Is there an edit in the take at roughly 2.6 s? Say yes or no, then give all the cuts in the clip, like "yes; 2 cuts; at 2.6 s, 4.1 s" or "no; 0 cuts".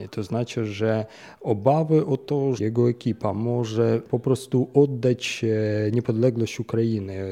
yes; 1 cut; at 2.6 s